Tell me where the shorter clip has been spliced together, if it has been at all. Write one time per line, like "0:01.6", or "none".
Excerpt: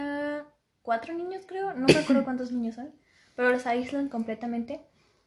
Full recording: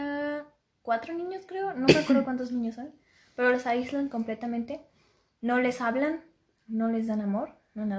none